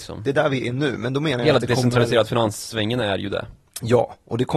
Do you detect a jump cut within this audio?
no; 0 cuts

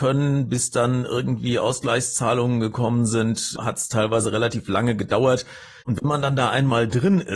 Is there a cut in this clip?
yes; 2 cuts; at 3.6 s, 5.8 s

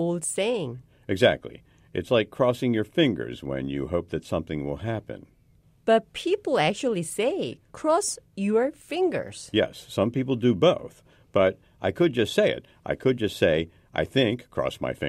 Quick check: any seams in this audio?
no; 0 cuts

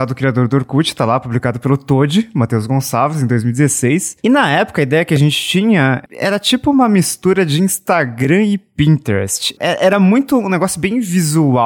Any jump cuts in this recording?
no; 0 cuts

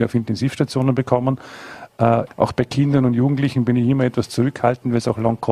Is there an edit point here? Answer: yes; 1 cut; at 2.3 s

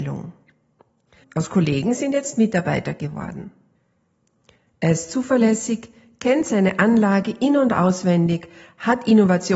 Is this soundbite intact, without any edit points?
no; 1 cut; at 1.2 s

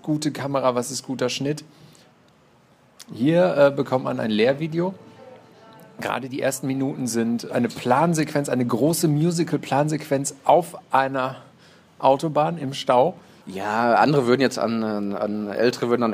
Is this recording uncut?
no; 1 cut; at 13.4 s

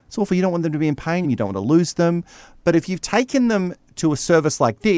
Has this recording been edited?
yes; 1 cut; at 1.2 s

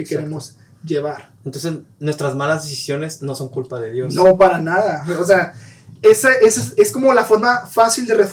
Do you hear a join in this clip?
no; 0 cuts

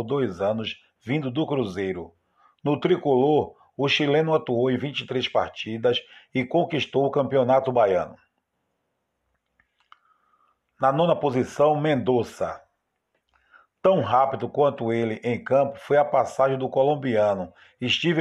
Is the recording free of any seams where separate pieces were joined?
yes; 0 cuts

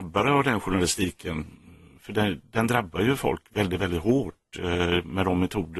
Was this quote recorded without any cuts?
yes; 0 cuts

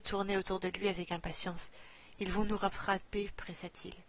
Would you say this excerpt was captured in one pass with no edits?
yes; 0 cuts

